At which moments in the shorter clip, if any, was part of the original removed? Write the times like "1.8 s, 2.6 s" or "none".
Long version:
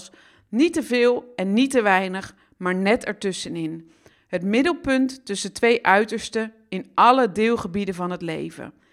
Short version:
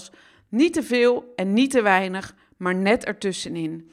none